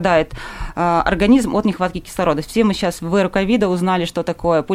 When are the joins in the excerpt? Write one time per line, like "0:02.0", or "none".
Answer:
none